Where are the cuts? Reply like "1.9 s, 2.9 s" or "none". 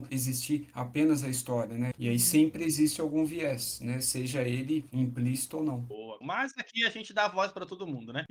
1.9 s, 6.2 s